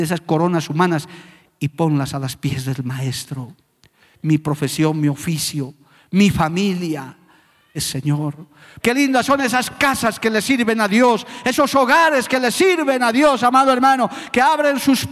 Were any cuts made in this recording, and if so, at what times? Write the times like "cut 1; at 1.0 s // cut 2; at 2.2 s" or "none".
cut 1; at 7.7 s // cut 2; at 8.8 s